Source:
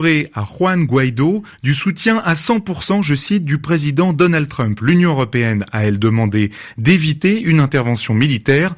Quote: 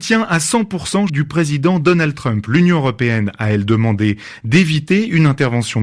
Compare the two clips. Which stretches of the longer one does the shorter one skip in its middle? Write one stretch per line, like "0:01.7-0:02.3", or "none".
0:03.0-0:03.4